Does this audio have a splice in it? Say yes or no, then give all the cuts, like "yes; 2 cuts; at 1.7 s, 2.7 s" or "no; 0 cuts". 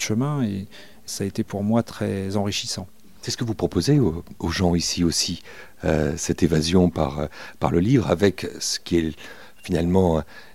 yes; 1 cut; at 1.1 s